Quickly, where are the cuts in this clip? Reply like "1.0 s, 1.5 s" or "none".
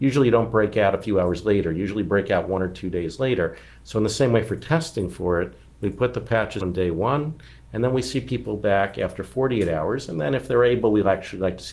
6.6 s